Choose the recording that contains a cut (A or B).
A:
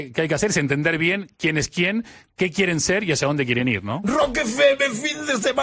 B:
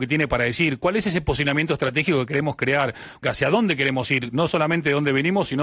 B